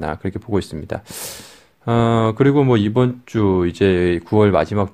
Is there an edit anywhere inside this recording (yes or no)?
no